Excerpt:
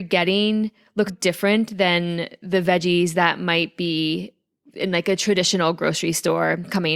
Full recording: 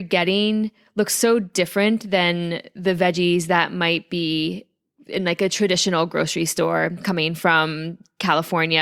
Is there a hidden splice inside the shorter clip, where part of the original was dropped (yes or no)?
yes